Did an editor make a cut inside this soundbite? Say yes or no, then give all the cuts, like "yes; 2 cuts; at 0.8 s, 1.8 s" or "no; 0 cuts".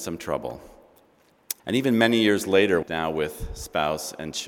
yes; 2 cuts; at 1.6 s, 2.8 s